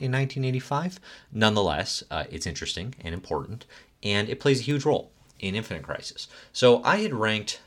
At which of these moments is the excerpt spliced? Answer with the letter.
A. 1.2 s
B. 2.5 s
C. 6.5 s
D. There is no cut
D